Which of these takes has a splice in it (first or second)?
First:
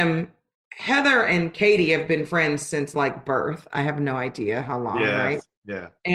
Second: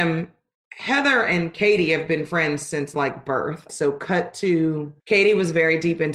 second